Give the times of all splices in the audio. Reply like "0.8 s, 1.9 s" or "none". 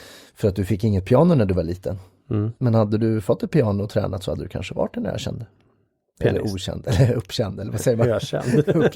none